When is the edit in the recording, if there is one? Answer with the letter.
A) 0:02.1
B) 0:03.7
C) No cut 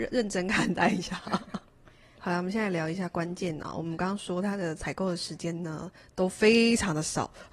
A